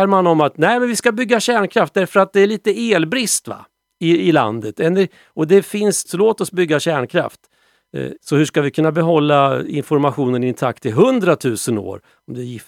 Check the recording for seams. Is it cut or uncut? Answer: cut